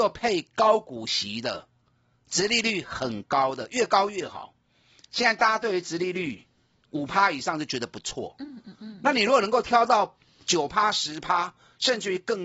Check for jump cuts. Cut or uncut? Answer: uncut